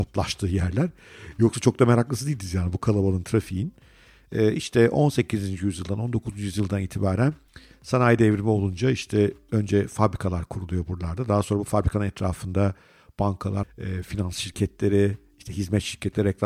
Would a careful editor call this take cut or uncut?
cut